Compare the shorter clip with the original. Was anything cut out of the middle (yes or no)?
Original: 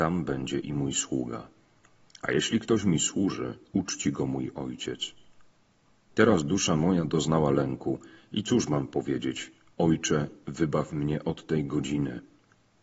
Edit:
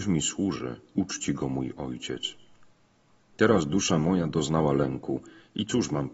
no